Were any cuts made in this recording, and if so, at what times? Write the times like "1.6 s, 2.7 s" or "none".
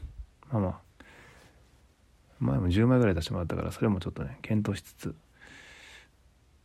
none